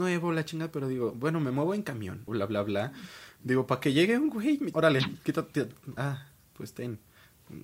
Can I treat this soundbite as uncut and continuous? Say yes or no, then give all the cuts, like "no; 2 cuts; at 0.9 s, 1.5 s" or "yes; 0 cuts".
no; 3 cuts; at 2.3 s, 4.7 s, 6.0 s